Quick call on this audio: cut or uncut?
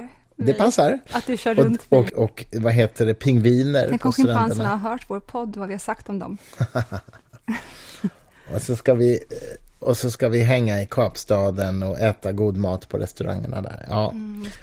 cut